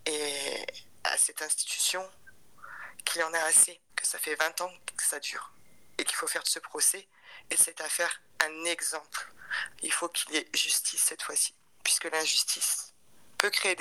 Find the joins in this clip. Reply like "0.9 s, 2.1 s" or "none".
3.9 s, 9.8 s